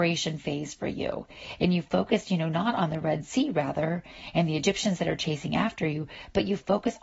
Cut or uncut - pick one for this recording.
uncut